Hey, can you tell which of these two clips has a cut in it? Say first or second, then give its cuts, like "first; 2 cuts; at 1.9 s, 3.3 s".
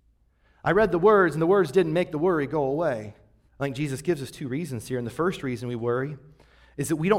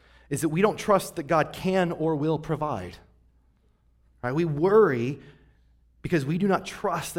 first; 1 cut; at 3.5 s